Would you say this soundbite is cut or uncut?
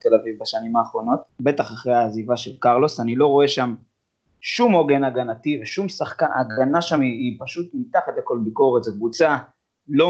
uncut